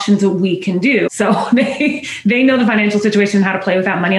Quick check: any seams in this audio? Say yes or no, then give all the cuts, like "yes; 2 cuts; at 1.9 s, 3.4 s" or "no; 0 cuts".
yes; 1 cut; at 1.1 s